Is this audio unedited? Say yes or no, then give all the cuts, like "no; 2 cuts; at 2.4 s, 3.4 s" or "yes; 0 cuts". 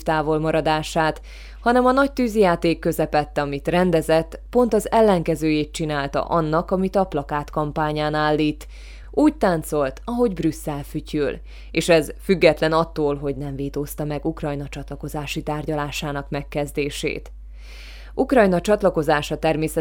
yes; 0 cuts